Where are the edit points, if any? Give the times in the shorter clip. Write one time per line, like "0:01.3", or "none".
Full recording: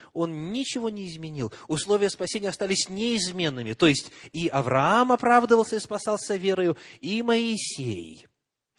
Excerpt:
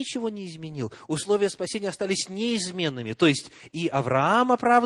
none